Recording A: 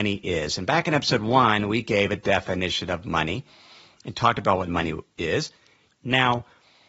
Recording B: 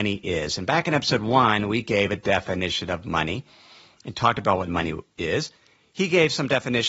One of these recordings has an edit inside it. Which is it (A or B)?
A